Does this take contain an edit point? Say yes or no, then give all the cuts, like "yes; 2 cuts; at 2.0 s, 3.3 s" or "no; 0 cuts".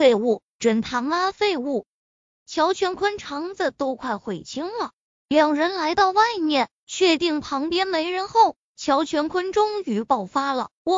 yes; 1 cut; at 5.1 s